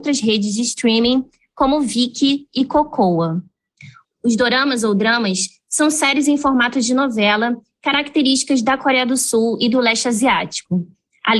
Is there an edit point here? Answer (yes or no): yes